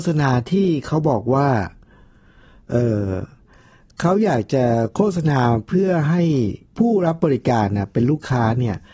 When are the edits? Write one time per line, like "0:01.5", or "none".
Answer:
0:06.7